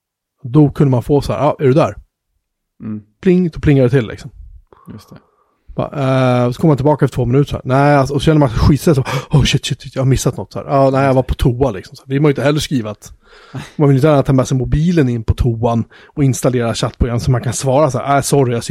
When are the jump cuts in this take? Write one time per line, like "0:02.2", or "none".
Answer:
none